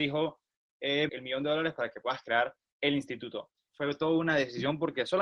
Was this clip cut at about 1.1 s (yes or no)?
yes